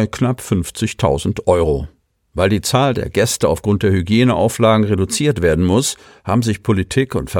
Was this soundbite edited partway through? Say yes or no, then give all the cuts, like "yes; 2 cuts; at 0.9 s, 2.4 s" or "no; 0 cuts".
no; 0 cuts